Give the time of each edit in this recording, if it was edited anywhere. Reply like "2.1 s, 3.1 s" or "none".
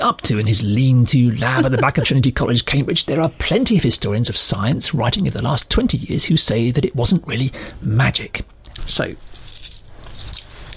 8.8 s